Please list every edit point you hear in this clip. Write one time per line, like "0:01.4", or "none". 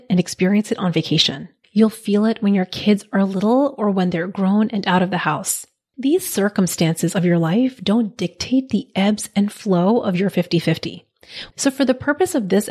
0:01.6
0:11.5

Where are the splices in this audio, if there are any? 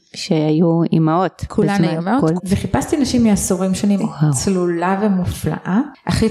0:02.4
0:04.0

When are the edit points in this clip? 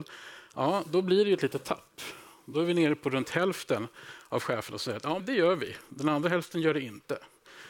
0:05.2

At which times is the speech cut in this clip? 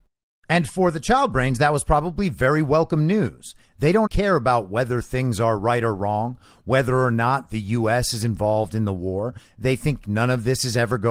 0:04.1

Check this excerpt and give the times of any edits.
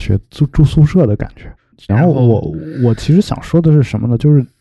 0:01.9

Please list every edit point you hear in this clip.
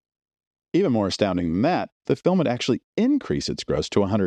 0:02.1

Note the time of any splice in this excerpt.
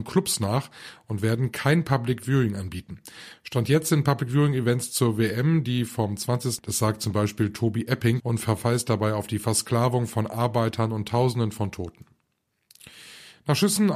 0:06.6
0:08.2

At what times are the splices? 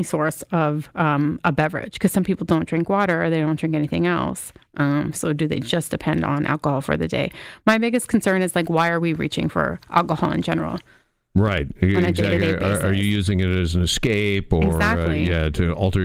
none

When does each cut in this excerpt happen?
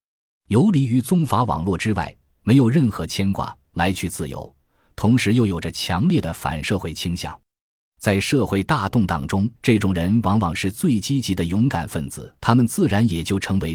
0:09.6
0:12.4

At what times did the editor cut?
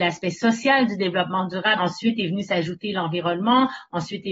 0:01.8

